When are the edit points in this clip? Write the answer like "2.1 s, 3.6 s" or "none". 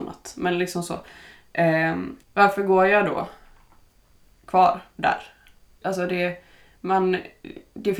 2.2 s, 5.8 s